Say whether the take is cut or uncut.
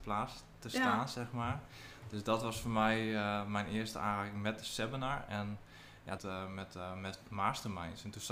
cut